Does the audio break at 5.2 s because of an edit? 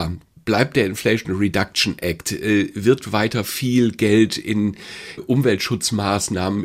yes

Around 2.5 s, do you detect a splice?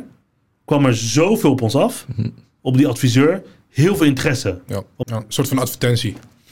no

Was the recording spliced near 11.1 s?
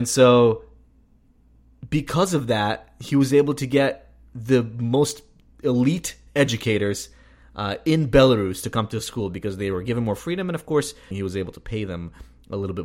yes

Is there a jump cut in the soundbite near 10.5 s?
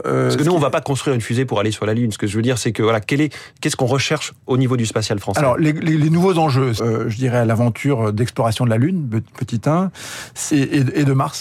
yes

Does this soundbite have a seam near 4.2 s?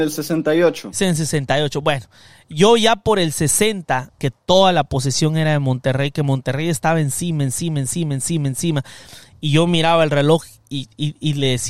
yes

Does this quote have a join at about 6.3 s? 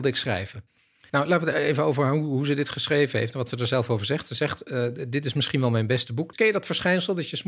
yes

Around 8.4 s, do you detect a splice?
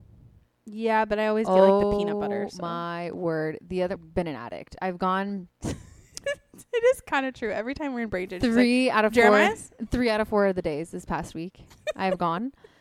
no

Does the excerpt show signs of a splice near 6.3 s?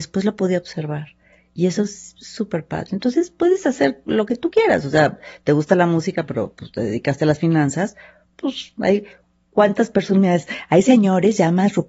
no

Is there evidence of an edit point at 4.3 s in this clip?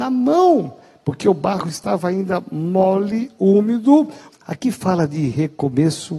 yes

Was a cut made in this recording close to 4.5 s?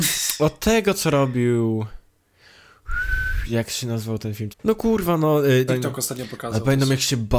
yes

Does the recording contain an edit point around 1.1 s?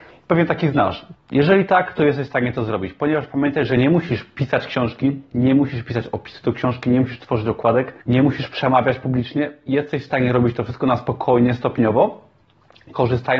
yes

